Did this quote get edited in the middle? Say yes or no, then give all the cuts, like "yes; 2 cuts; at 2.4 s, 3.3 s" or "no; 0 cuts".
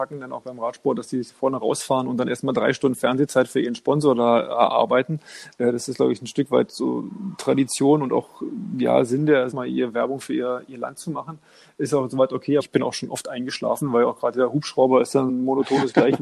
yes; 3 cuts; at 9.5 s, 12.6 s, 15.3 s